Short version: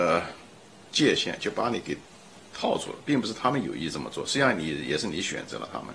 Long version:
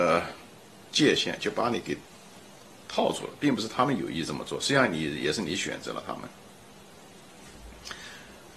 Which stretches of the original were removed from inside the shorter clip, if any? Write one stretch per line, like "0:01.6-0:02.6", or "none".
0:02.5-0:02.8

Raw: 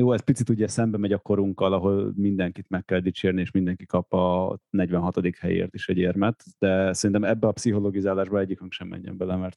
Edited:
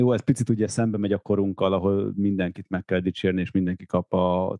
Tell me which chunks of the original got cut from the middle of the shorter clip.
none

